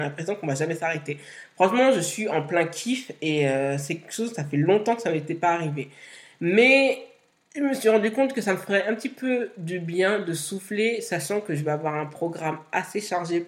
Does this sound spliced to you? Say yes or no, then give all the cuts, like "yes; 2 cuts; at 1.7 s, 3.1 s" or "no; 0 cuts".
no; 0 cuts